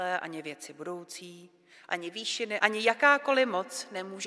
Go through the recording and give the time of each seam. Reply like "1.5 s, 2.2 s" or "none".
2.6 s